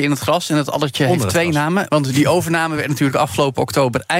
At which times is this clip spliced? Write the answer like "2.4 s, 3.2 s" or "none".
1.9 s